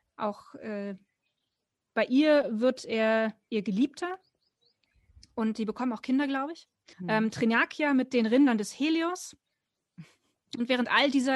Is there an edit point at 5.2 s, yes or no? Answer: no